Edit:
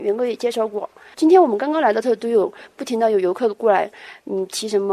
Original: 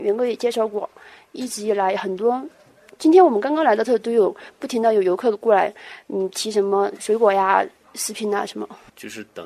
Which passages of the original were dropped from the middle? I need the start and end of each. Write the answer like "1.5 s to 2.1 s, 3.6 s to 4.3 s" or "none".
1.1 s to 3.0 s

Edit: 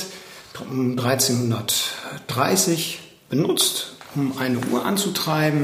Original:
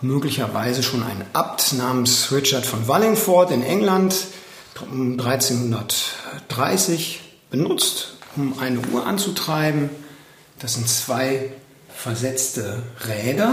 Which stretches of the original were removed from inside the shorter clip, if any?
none

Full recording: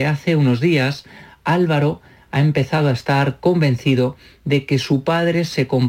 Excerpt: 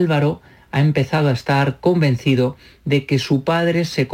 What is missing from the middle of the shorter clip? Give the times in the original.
none

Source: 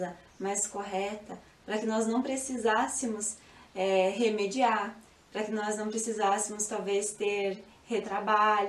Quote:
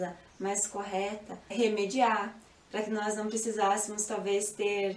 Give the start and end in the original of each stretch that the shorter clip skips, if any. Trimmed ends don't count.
1.5 s to 4.1 s

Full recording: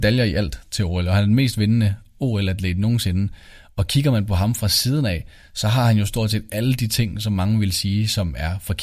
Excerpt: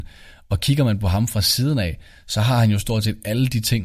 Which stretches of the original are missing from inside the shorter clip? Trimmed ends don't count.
none

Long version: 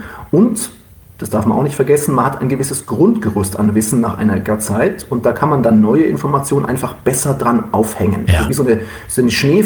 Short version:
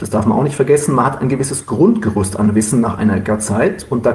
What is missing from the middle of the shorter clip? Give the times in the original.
none

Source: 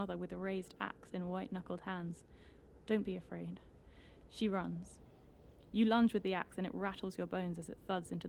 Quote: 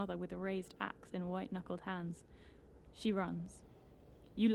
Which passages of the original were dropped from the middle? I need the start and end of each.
2.8 s to 4.2 s

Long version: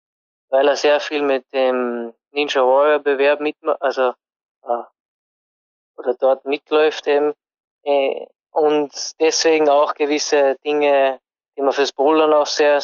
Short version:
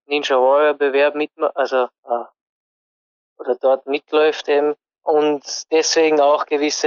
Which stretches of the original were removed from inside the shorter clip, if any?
4.2 s to 4.5 s, 7.5 s to 8.4 s

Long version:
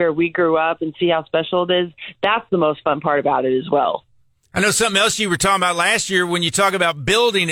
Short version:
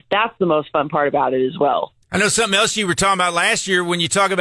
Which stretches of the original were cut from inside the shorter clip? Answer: 4.1 s to 4.4 s

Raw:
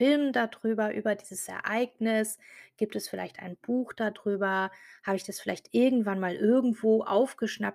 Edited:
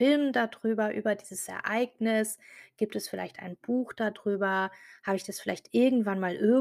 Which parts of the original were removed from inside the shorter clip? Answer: none

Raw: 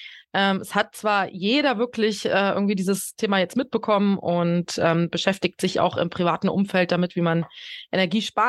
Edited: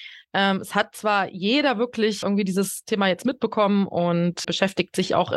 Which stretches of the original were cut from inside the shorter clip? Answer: 2.2 s to 2.5 s, 4.8 s to 5.1 s

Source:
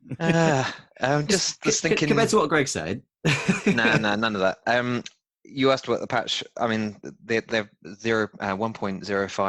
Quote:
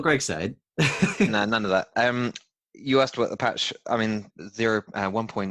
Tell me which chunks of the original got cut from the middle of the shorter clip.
3.7 s to 4.0 s, 7.0 s to 7.8 s

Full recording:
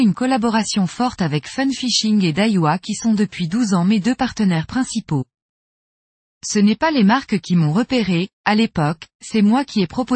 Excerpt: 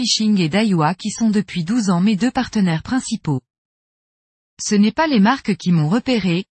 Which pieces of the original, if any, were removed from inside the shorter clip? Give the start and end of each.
none

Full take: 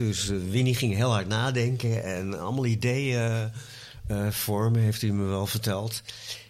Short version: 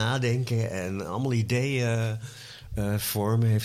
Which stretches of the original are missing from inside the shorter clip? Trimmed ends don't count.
none

